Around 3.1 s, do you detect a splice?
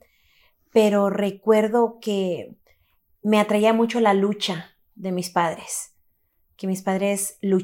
no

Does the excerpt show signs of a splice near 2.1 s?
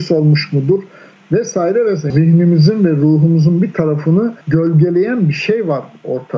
yes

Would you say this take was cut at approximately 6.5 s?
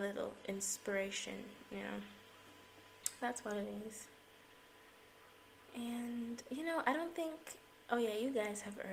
no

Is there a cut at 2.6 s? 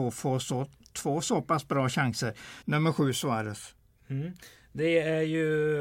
yes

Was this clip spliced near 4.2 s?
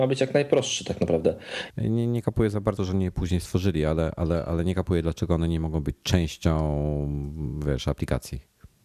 no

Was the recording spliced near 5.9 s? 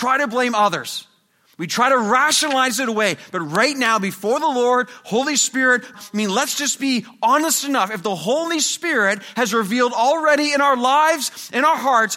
yes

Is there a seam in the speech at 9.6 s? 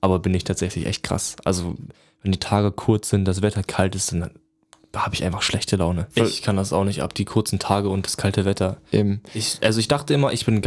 no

